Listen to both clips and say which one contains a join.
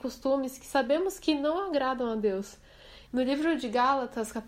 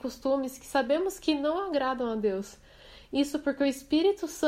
first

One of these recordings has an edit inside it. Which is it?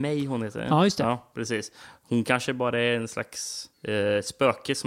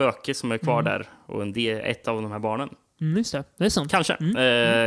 first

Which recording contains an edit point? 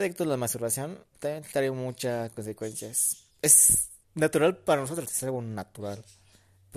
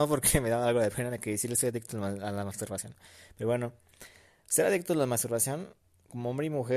first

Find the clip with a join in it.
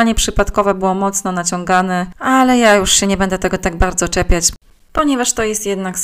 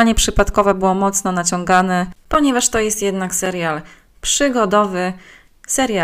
second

